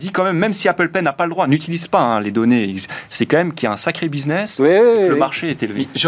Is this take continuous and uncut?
yes; 0 cuts

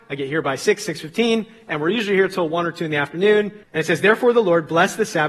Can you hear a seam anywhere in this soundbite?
yes; 1 cut; at 3.6 s

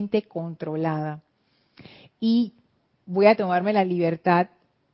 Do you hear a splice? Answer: no; 0 cuts

